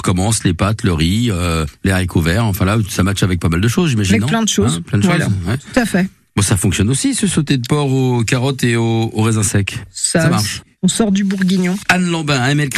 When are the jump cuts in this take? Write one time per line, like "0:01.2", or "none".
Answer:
none